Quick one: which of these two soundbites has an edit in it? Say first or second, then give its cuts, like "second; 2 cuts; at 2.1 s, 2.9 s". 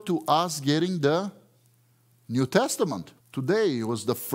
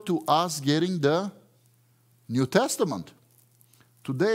first; 1 cut; at 3.2 s